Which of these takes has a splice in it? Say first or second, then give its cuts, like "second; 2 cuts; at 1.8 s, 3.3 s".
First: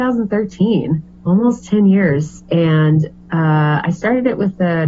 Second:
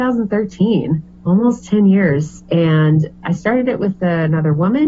second; 1 cut; at 3.2 s